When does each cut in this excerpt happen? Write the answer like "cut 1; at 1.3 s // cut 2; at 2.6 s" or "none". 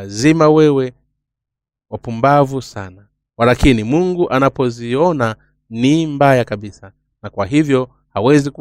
none